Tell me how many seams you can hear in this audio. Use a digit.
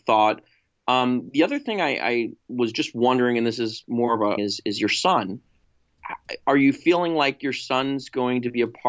1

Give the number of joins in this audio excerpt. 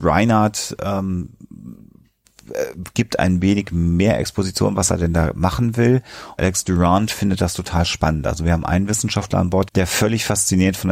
2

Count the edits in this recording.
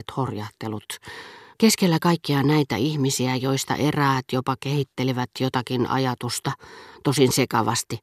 1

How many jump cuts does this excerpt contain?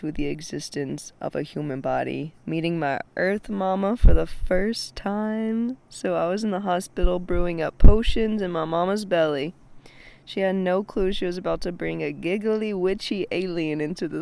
0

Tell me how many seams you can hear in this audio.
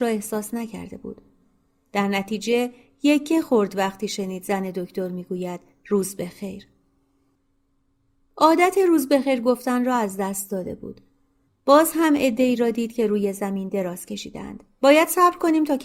2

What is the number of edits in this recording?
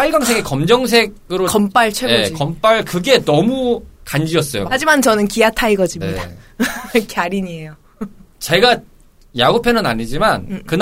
1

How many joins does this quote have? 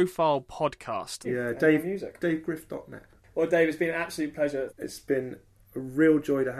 2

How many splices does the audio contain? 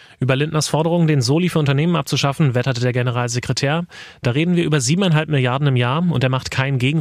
0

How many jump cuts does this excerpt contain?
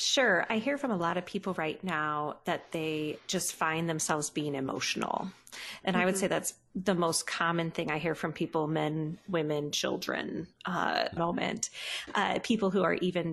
1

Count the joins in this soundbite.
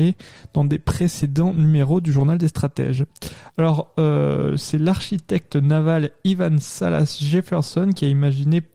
1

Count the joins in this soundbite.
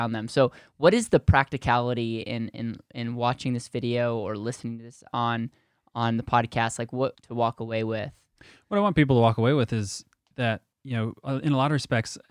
2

